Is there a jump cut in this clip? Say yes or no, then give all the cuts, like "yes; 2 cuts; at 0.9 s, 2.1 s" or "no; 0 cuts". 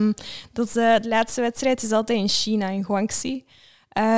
no; 0 cuts